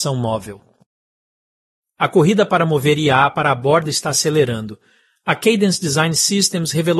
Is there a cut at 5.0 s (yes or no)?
no